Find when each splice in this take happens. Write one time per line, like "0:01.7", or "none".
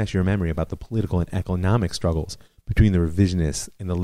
none